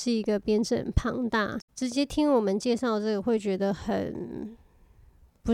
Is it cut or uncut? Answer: cut